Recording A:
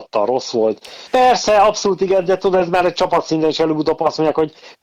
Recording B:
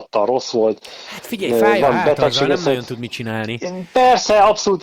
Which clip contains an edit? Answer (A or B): A